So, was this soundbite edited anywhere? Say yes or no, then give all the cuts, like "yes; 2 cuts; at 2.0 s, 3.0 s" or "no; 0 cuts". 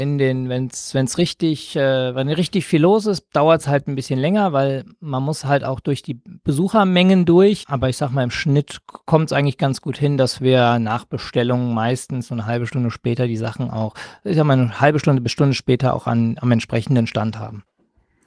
no; 0 cuts